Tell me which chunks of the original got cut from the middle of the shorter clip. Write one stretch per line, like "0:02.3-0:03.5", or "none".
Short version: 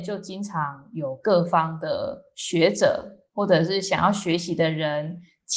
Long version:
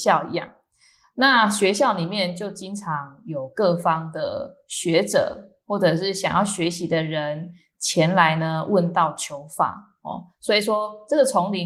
none

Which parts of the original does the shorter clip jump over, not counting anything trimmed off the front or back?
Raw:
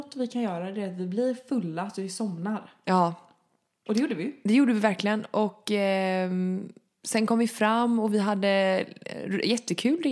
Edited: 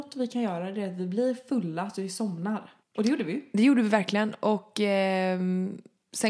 0:02.8-0:03.7

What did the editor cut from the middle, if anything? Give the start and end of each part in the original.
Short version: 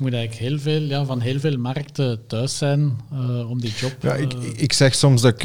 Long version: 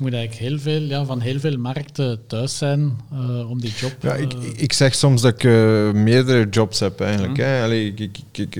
none

